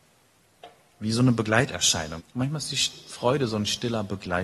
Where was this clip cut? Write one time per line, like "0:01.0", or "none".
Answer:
0:02.2